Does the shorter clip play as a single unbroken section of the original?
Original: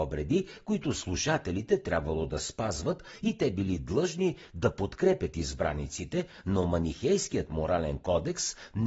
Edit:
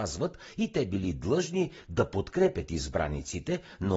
yes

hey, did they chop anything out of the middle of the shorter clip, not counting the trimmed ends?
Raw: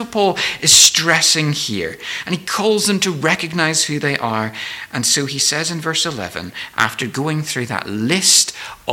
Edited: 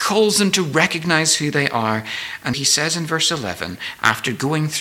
yes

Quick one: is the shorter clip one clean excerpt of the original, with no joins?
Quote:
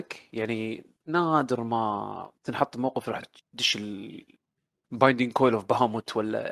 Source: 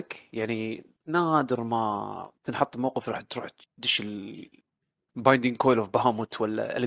no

